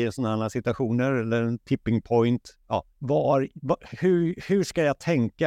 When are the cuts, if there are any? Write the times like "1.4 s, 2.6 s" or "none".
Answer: 2.9 s